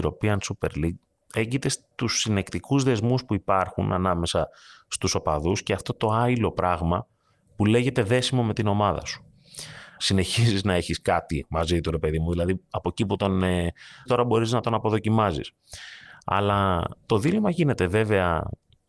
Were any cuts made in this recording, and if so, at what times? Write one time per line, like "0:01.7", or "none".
0:10.0
0:14.1